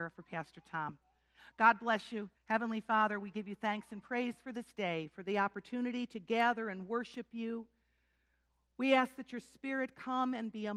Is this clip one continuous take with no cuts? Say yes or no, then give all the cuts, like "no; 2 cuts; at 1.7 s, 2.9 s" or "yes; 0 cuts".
no; 1 cut; at 2.3 s